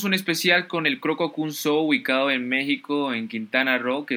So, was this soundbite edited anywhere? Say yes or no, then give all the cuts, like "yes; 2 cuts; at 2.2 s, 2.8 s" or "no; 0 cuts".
no; 0 cuts